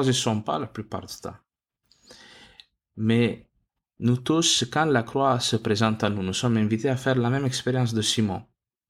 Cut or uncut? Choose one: uncut